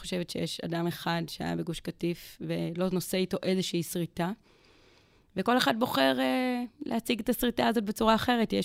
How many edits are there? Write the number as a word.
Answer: zero